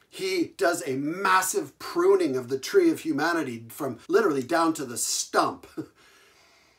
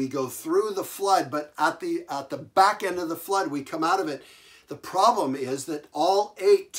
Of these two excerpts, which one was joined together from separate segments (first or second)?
first